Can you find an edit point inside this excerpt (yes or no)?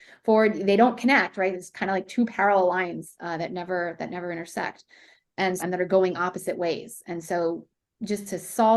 yes